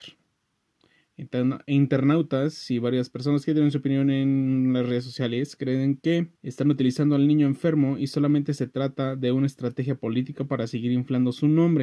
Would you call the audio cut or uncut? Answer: cut